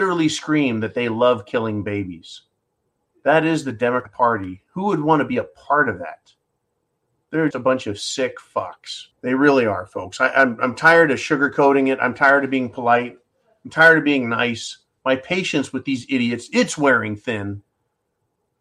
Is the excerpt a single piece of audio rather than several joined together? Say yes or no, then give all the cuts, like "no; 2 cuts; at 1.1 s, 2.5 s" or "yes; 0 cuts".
no; 2 cuts; at 7.5 s, 9.1 s